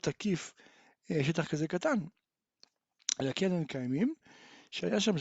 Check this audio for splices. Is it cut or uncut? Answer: uncut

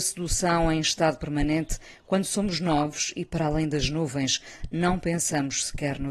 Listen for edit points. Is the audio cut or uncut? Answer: uncut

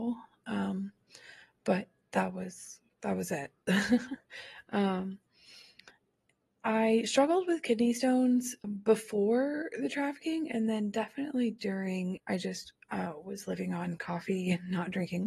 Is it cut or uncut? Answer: cut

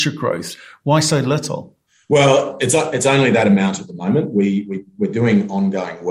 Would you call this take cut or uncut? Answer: uncut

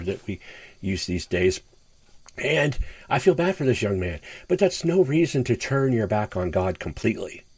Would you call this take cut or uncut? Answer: cut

